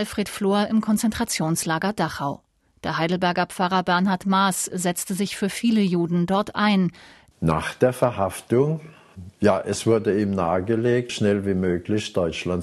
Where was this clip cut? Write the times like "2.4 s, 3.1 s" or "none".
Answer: 7.3 s, 11.1 s